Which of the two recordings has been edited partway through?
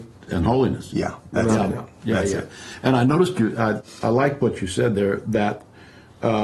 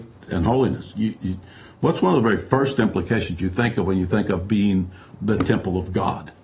second; 1 cut; at 0.9 s

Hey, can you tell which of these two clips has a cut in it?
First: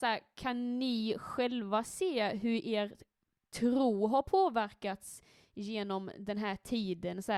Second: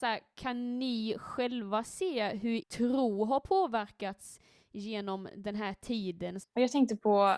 second; 2 cuts; at 2.6 s, 6.4 s

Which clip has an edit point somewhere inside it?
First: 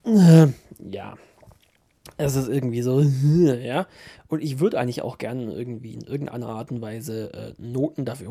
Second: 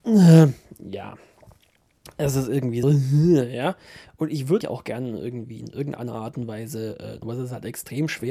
second; 3 cuts; at 2.8 s, 4.6 s, 7.2 s

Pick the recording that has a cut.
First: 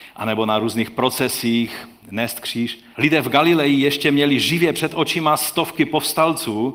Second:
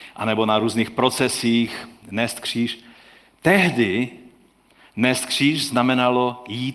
first; 1 cut; at 2.9 s

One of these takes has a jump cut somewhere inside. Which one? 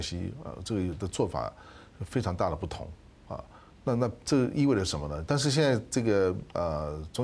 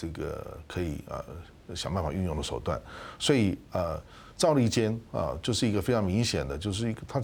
first; 1 cut; at 5.3 s

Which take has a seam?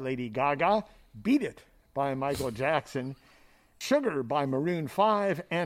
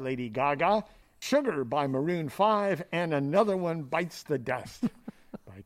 second; 1 cut; at 1.0 s

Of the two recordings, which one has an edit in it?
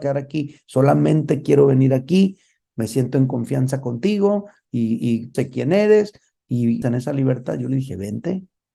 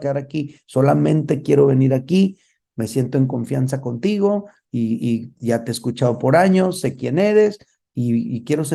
first; 2 cuts; at 5.3 s, 6.8 s

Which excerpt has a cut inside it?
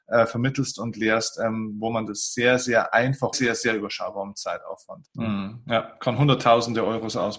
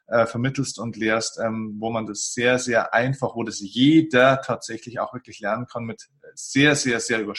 first; 2 cuts; at 3.3 s, 5.0 s

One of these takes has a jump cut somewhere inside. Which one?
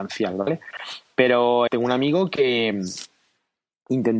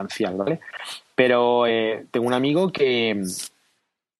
first; 1 cut; at 1.7 s

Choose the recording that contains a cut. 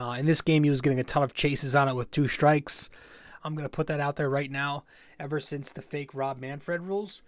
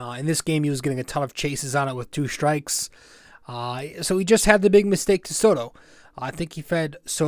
first; 1 cut; at 3.4 s

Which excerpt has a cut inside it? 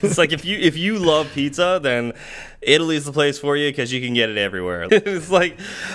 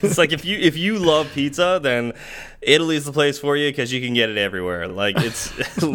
first; 1 cut; at 4.9 s

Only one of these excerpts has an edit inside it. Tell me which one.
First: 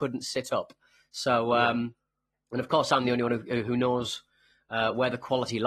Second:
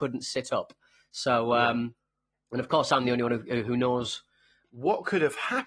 second; 1 cut; at 4.6 s

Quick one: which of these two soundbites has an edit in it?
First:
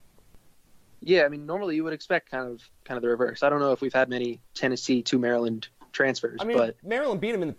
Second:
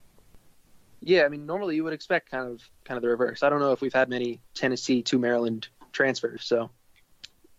second; 1 cut; at 6.4 s

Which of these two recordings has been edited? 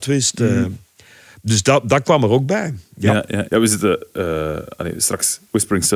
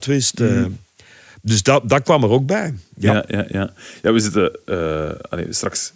first; 1 cut; at 3.5 s

